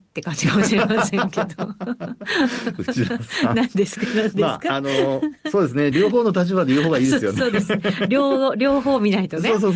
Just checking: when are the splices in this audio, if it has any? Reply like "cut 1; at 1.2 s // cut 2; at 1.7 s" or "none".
none